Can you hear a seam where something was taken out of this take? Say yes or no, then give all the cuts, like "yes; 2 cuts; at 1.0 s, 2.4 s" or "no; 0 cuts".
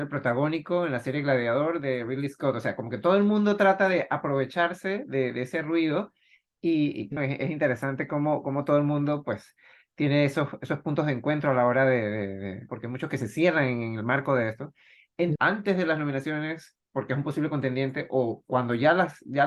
yes; 3 cuts; at 7.2 s, 12.7 s, 15.4 s